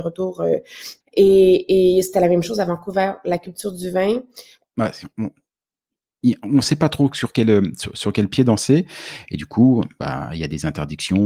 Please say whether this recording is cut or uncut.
cut